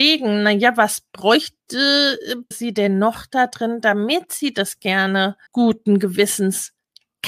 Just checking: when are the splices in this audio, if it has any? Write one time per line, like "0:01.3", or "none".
0:02.5
0:05.5